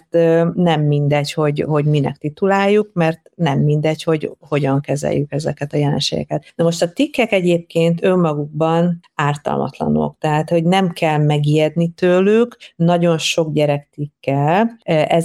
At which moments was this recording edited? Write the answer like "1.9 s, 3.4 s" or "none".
none